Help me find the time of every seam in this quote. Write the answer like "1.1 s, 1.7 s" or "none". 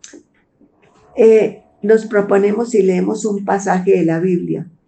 none